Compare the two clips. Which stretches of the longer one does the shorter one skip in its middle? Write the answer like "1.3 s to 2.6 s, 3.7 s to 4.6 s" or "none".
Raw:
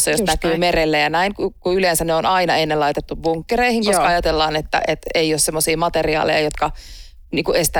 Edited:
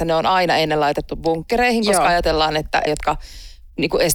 4.9 s to 6.4 s